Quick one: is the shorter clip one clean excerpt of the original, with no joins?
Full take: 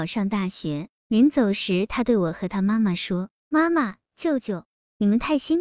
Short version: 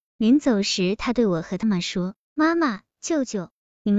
no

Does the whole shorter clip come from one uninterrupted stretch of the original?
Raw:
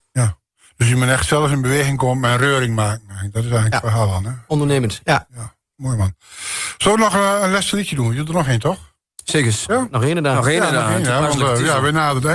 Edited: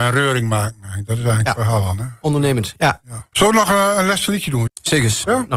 no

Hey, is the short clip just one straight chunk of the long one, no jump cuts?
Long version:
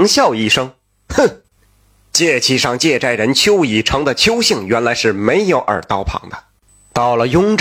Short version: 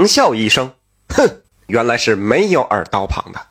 no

